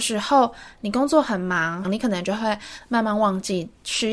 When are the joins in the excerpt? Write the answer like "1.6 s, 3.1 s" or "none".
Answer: 1.8 s